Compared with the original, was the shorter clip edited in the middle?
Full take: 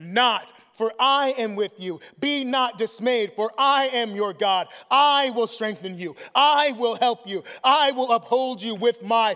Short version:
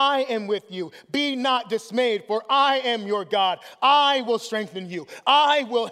no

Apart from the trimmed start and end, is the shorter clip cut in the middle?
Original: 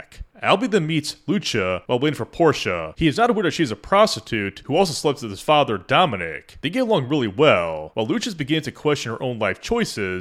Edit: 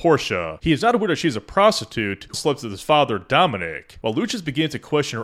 yes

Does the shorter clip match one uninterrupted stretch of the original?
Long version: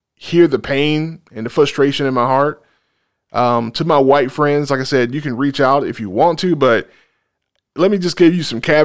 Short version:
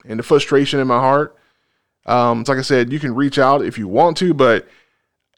no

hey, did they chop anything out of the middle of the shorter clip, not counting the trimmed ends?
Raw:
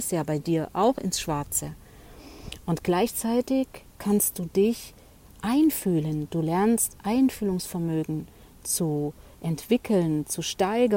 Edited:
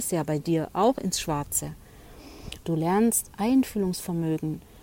yes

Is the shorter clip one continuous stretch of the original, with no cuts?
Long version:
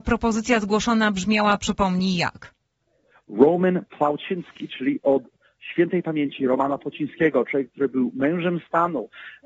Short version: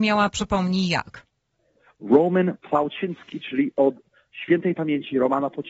yes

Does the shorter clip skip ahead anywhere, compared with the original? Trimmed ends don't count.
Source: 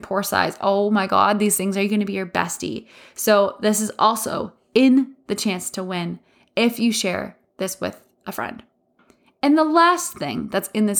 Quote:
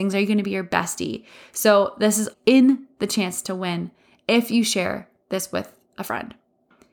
yes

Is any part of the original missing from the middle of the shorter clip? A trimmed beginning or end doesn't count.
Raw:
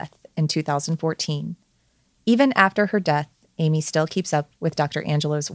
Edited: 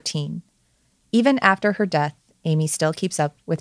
no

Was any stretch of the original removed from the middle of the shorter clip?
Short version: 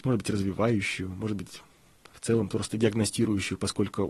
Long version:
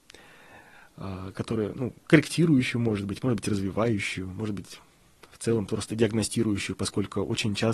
no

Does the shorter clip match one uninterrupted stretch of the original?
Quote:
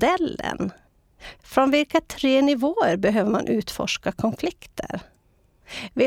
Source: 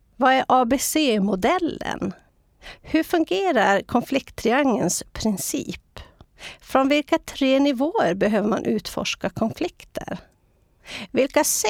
no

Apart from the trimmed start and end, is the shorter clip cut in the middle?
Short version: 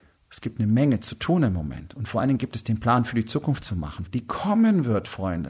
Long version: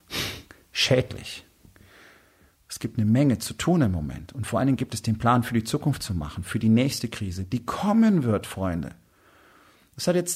yes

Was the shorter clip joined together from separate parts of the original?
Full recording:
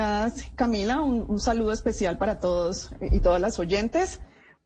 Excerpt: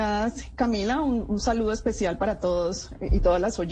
no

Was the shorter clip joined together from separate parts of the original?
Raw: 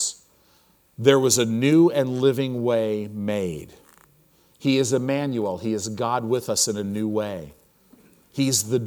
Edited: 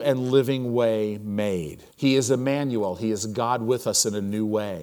yes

